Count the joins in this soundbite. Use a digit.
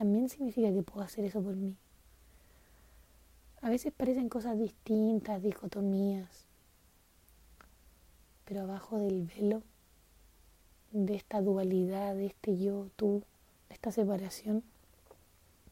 0